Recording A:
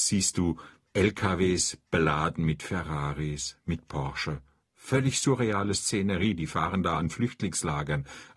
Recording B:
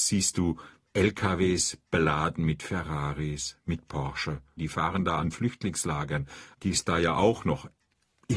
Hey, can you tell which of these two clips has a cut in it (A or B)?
B